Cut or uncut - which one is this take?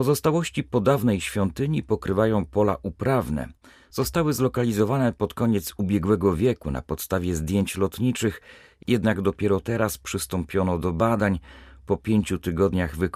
uncut